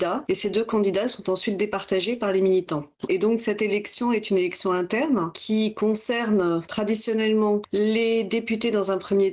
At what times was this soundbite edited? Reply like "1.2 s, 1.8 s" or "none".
3.1 s